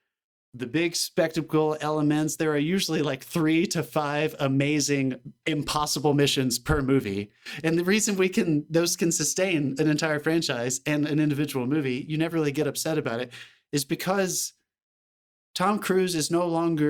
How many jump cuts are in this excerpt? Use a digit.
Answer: 0